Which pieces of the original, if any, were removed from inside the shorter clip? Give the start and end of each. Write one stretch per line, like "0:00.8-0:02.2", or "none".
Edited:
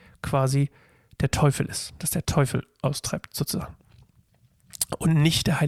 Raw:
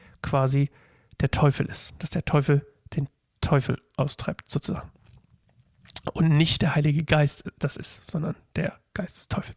0:02.2-0:03.4

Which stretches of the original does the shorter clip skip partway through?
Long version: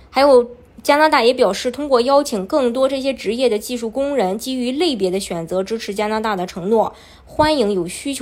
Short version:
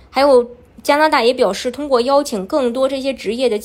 none

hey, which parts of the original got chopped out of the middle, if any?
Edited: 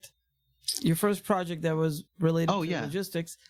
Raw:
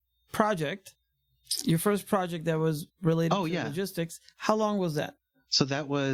none

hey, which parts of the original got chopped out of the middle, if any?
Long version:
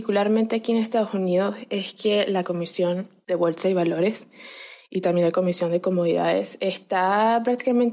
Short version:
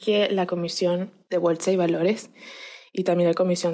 none

